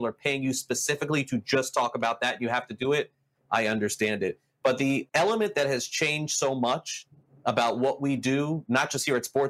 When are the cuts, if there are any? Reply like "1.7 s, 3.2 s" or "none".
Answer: none